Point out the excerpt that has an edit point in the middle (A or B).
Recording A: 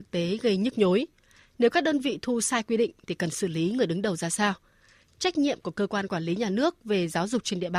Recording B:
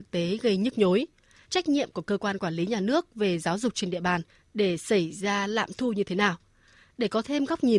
B